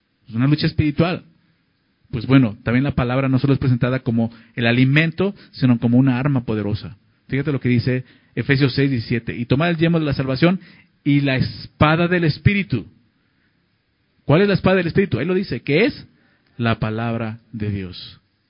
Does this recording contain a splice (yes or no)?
no